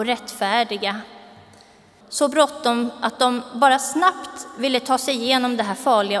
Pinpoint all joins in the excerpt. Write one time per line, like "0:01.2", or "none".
0:02.0